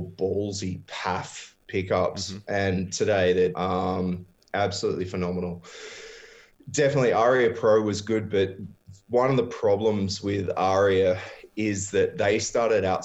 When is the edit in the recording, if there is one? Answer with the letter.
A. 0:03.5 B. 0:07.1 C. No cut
A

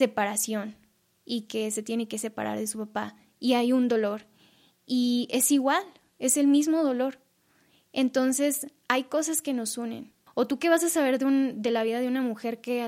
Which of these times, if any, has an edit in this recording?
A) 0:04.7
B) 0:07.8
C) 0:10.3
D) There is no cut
C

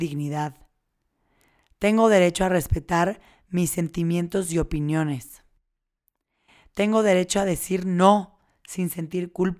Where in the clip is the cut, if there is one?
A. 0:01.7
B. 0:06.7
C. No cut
C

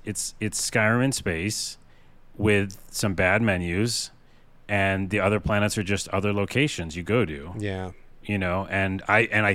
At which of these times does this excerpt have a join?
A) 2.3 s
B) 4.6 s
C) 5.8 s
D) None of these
D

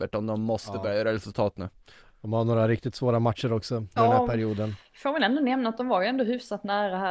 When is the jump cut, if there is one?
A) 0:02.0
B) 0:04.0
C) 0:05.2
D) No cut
B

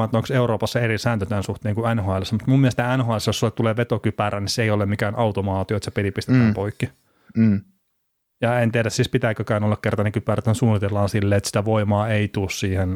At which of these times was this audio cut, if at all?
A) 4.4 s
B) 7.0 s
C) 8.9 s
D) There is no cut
D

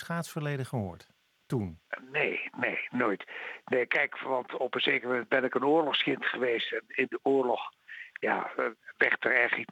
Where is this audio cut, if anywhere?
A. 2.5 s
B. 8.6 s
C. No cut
C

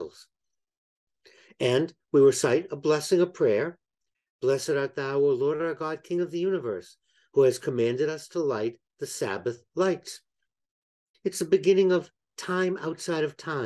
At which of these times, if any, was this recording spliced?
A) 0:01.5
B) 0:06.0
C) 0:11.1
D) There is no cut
D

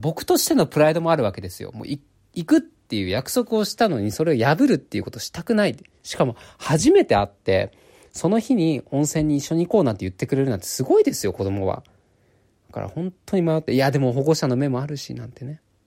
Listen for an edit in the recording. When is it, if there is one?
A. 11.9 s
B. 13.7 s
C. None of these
C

